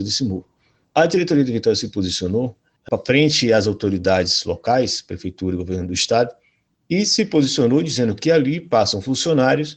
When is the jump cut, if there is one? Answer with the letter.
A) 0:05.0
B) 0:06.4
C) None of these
C